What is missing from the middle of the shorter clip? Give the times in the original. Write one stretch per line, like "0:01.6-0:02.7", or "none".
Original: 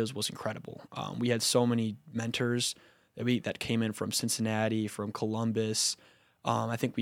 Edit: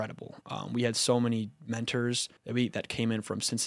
0:02.8-0:03.1

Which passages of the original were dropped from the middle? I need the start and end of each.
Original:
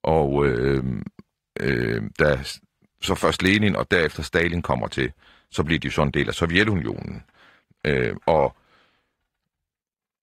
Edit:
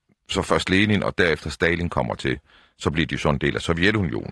none

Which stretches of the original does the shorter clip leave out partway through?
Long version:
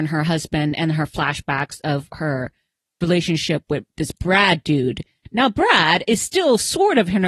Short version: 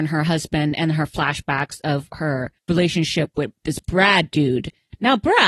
0:02.6-0:02.9

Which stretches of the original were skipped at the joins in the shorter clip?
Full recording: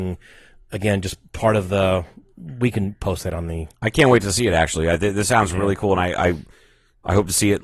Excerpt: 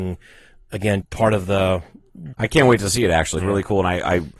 0:01.0-0:01.2
0:02.6-0:03.8
0:04.8-0:05.5

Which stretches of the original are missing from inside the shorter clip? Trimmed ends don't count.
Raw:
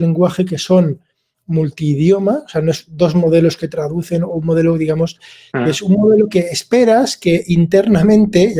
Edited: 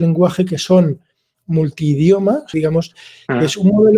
0:02.5-0:04.8

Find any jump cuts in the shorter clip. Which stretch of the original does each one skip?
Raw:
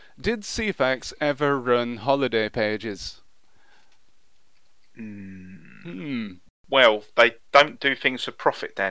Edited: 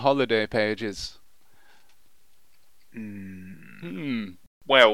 none

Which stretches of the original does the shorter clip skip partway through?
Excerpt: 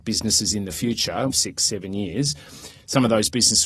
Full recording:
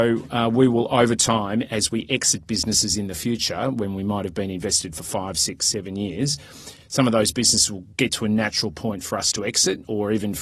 0:03.7-0:05.3

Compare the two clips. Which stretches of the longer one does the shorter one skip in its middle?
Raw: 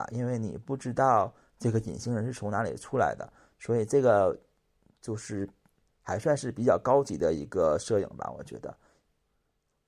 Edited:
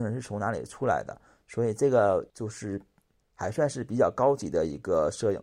0:04.4-0:05.0

